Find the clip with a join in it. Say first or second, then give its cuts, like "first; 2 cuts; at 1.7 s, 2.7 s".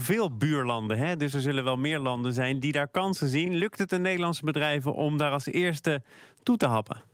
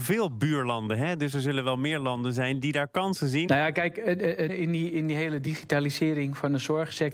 second; 2 cuts; at 3.5 s, 4.5 s